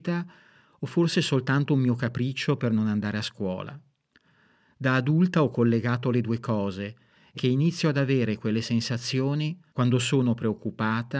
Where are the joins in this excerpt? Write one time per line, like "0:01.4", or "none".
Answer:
0:07.3
0:09.7